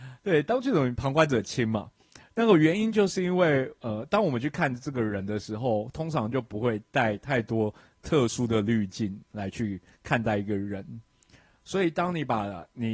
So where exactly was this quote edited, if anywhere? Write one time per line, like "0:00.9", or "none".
none